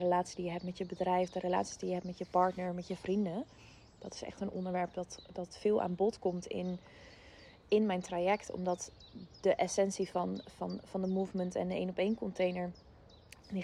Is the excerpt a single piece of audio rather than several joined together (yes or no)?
yes